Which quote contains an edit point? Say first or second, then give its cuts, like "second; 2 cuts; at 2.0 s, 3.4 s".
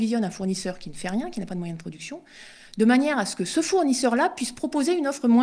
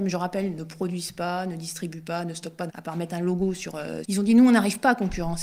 second; 2 cuts; at 2.7 s, 4.0 s